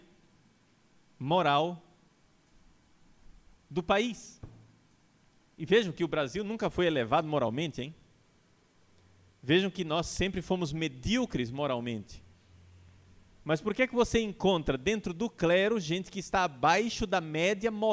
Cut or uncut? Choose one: uncut